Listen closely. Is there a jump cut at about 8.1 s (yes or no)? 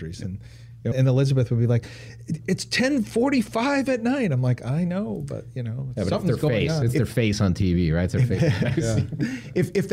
no